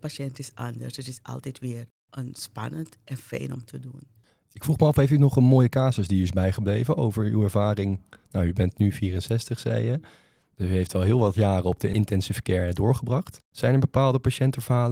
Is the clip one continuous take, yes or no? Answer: yes